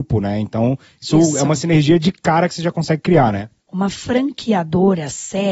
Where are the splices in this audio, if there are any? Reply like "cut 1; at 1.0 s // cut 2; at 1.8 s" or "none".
cut 1; at 3.6 s